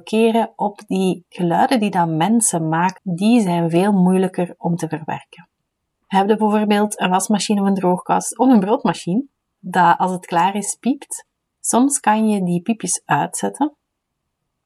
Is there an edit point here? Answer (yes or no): yes